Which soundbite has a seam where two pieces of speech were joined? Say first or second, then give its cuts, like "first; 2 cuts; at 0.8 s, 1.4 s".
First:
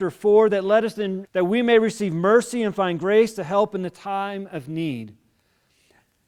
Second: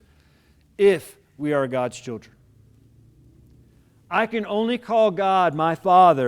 first; 1 cut; at 1.2 s